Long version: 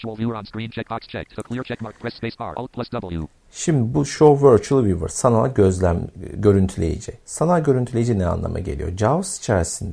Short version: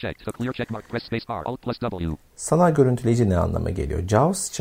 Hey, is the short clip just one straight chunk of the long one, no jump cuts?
no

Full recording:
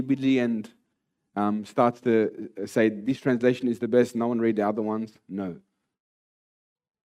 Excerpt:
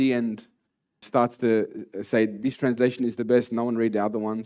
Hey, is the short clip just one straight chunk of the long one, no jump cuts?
no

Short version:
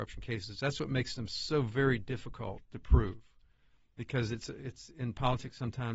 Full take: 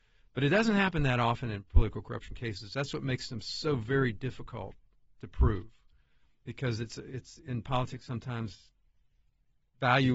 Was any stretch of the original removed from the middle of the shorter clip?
yes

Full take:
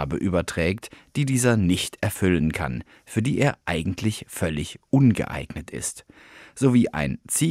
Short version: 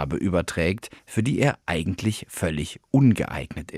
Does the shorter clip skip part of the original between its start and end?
yes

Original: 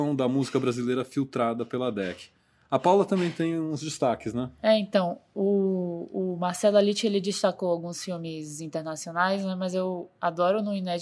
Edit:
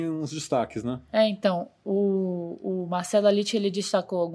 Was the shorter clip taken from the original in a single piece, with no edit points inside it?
yes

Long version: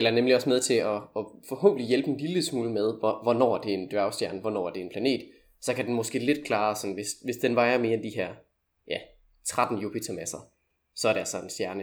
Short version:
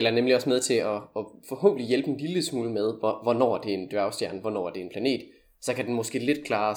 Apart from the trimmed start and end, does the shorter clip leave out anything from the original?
no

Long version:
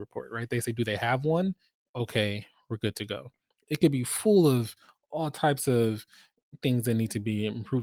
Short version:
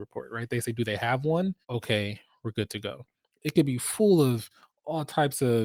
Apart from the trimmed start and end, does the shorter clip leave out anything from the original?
yes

